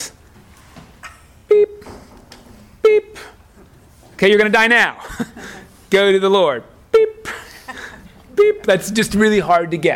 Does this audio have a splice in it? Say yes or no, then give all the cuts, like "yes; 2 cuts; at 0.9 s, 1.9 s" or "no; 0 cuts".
no; 0 cuts